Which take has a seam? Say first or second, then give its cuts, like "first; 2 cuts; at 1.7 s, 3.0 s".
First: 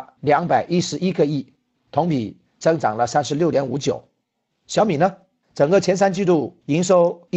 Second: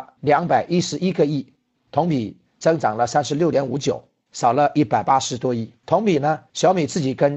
second; 1 cut; at 4.3 s